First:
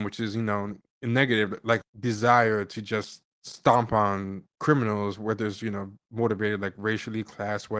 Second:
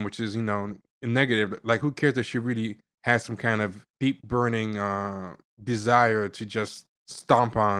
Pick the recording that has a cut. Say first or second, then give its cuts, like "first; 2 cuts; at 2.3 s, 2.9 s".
first; 1 cut; at 1.8 s